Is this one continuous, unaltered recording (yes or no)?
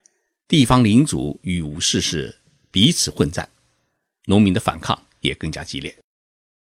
yes